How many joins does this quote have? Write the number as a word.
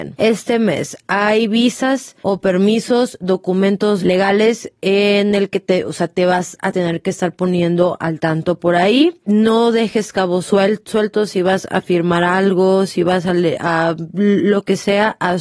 zero